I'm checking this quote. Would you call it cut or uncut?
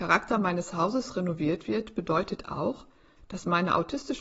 uncut